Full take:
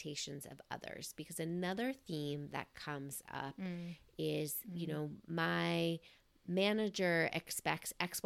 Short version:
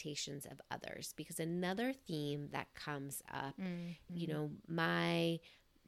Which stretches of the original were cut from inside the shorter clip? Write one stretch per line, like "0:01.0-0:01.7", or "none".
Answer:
0:04.1-0:04.7